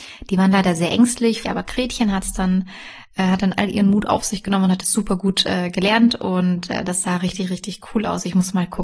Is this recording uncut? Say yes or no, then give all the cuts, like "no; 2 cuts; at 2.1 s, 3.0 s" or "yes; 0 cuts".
no; 1 cut; at 1.4 s